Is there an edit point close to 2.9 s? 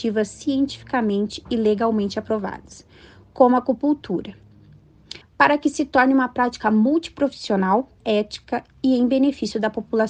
no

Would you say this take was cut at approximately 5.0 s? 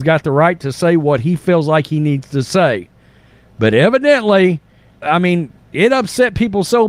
yes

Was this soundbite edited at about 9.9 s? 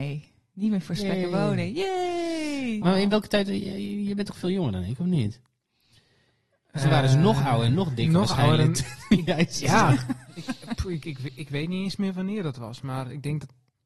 no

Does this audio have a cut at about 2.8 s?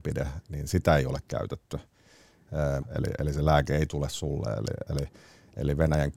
yes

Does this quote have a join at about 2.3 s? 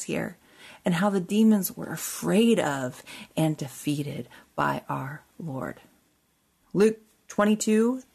no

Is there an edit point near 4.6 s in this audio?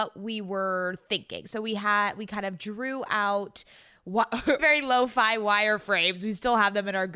yes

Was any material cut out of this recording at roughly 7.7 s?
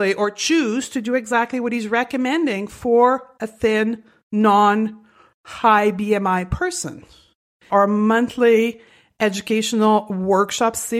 yes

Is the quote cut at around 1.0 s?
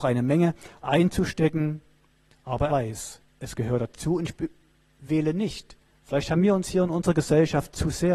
no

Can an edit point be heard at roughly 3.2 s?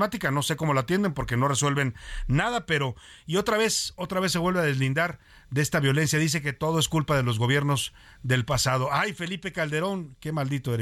no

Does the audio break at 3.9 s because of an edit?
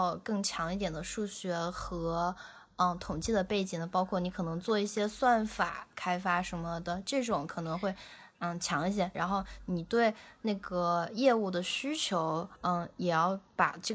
no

